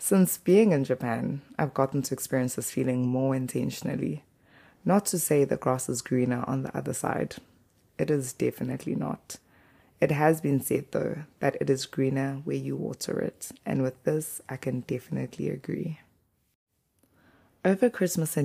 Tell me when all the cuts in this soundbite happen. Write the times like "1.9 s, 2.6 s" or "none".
none